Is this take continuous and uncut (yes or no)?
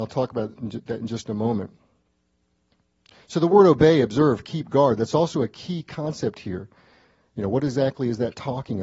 yes